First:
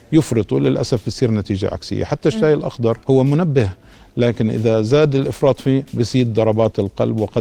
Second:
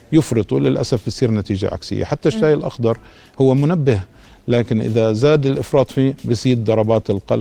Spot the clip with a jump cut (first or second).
first